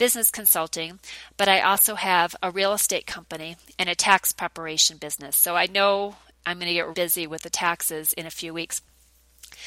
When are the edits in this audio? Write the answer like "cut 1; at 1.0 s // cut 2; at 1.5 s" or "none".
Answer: cut 1; at 6.9 s